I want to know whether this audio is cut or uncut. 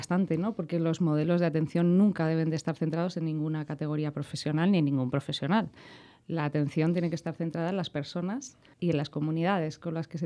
uncut